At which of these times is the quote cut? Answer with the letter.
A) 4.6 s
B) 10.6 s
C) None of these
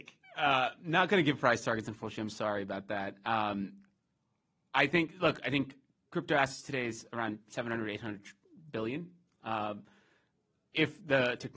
C